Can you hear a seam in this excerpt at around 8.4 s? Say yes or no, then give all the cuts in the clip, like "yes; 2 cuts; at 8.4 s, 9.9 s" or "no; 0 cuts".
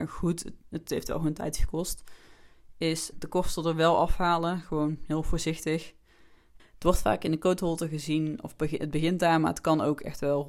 no; 2 cuts; at 3.1 s, 6.6 s